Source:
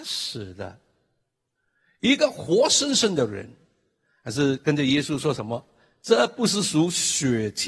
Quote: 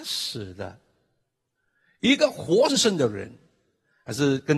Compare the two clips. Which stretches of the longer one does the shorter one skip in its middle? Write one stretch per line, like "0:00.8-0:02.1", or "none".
0:02.7-0:02.9